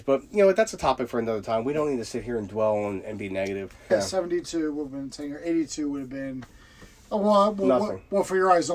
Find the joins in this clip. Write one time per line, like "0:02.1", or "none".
0:03.9